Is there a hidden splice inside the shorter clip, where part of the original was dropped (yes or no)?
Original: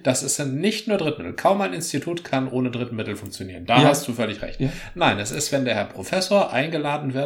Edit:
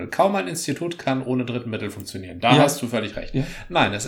no